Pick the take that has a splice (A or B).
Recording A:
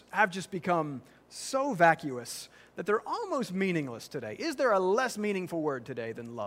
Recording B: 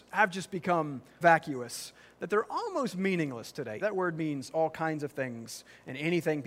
B